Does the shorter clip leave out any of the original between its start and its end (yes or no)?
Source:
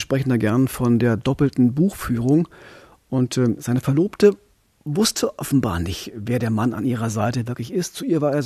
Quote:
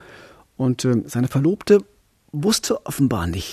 no